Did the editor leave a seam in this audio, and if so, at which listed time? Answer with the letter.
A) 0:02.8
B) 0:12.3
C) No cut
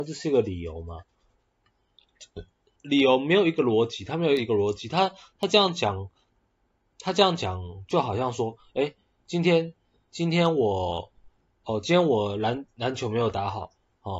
A